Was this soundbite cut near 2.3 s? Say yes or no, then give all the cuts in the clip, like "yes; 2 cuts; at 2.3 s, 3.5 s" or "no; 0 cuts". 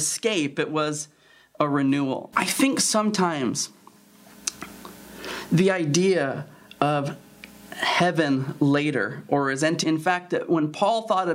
yes; 2 cuts; at 2.3 s, 9.8 s